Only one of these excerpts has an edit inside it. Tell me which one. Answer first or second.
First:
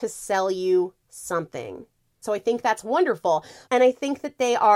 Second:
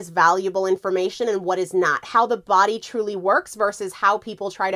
first